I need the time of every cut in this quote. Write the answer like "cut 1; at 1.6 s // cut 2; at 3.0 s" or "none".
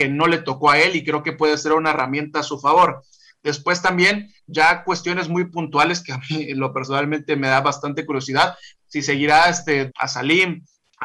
cut 1; at 8.7 s // cut 2; at 9.9 s